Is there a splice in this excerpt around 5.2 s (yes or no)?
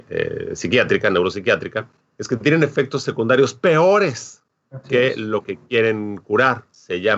no